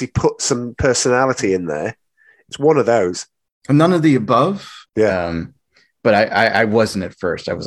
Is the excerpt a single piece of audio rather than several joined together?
no; 2 cuts; at 2.5 s, 4.8 s

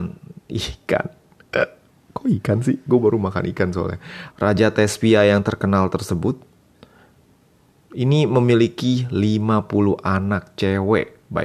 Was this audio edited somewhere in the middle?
yes; 1 cut; at 4.3 s

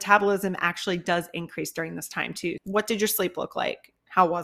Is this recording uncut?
no; 1 cut; at 2.6 s

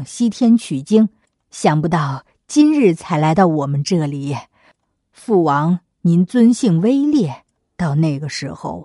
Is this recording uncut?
no; 1 cut; at 7.6 s

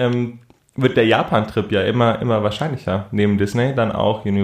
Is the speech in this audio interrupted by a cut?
no; 0 cuts

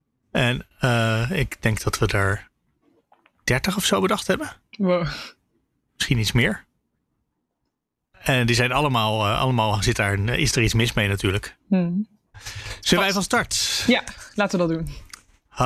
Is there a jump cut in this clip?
no; 0 cuts

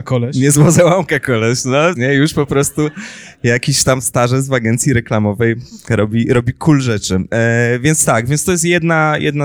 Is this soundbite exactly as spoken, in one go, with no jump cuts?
no; 1 cut; at 2.0 s

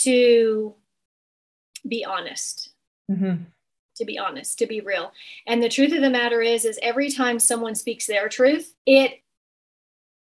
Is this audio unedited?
no; 1 cut; at 8.8 s

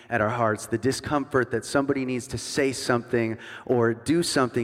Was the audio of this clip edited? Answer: no; 0 cuts

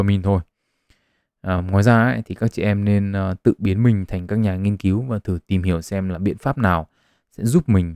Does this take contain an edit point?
no; 0 cuts

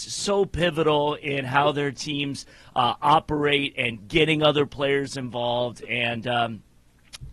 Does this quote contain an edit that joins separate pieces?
no; 0 cuts

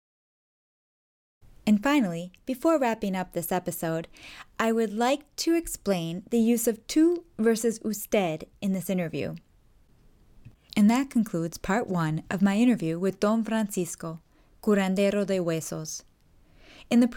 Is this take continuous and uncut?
no; 1 cut; at 10.7 s

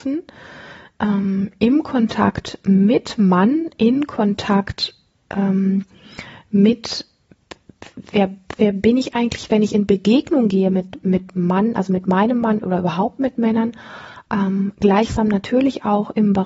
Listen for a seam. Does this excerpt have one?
no; 0 cuts

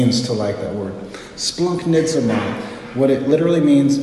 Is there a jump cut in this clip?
no; 0 cuts

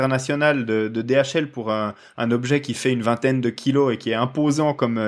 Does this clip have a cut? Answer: no; 0 cuts

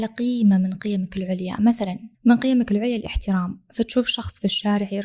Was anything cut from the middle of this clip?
yes; 1 cut; at 2.1 s

